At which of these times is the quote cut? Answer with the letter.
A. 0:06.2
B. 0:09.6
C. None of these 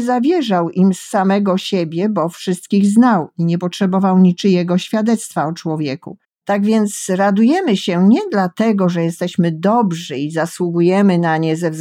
A